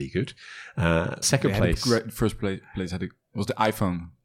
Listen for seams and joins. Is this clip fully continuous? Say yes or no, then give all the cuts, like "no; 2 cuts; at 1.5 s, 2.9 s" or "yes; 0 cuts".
no; 1 cut; at 1.2 s